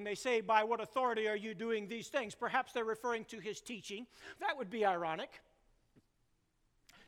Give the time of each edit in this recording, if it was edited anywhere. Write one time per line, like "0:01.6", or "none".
0:04.4